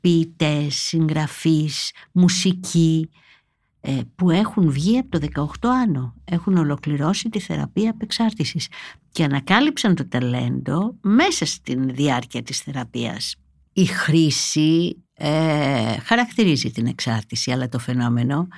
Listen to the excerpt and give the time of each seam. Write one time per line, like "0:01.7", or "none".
0:13.7